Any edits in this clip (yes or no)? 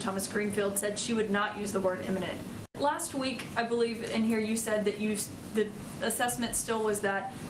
yes